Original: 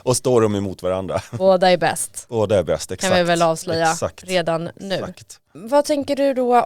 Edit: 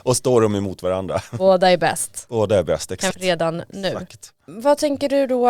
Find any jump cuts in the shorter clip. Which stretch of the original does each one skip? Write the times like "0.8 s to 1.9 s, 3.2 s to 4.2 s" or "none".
3.1 s to 4.2 s